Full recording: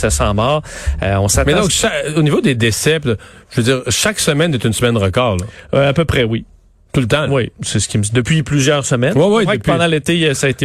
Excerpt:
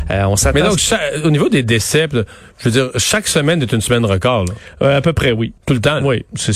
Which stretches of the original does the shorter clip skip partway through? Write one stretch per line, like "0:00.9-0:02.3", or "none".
0:06.5-0:06.8